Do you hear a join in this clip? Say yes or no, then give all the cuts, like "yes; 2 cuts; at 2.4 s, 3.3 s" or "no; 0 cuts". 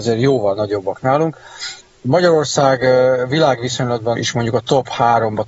yes; 1 cut; at 4.1 s